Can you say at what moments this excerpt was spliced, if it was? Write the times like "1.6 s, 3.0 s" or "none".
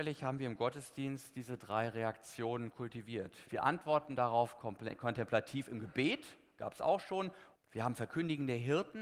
3.4 s, 7.5 s